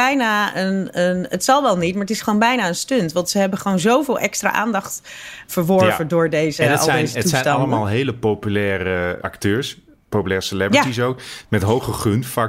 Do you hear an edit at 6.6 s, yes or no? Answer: no